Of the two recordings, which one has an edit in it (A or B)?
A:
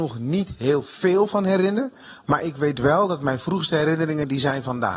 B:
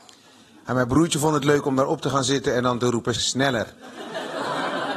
B